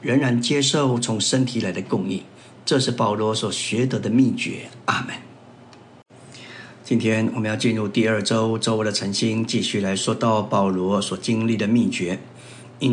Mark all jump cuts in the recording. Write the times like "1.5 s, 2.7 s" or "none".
none